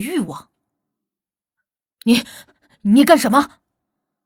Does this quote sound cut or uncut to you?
uncut